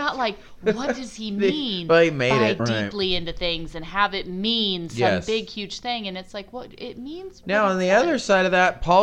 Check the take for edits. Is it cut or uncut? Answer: cut